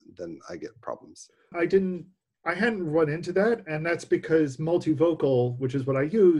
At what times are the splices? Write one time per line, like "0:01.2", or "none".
0:01.5